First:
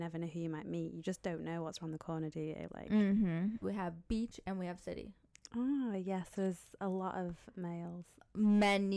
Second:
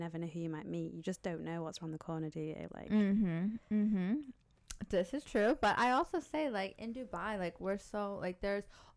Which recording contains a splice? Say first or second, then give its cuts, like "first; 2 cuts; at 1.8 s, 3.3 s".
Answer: first; 2 cuts; at 3.6 s, 5.5 s